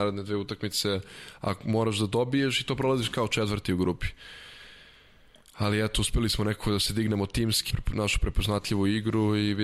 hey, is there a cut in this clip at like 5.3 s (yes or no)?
no